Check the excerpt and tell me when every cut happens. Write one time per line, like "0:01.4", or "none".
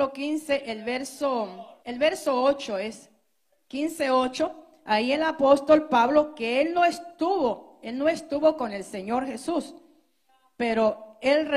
0:01.8